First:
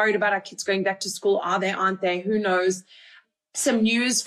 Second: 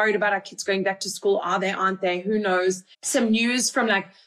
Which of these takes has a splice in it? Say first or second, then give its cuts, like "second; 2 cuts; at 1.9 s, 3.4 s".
second; 1 cut; at 2.9 s